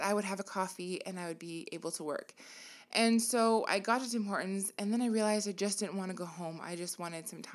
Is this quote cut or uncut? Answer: uncut